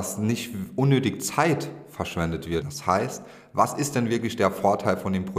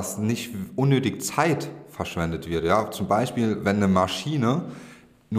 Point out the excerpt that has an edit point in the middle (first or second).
first